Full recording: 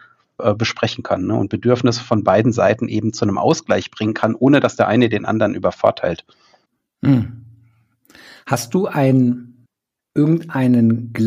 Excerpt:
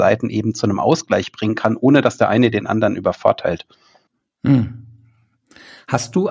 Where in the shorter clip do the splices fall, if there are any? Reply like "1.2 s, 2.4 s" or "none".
none